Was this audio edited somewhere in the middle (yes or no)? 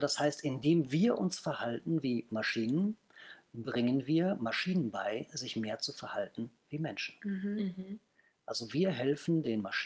no